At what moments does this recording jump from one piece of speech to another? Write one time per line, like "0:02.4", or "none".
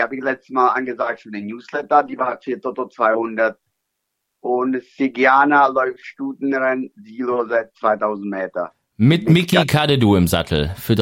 none